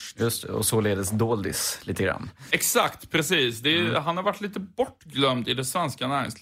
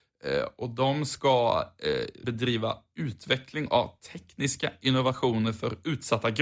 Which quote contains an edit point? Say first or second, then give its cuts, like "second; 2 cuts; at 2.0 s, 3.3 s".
second; 1 cut; at 2.2 s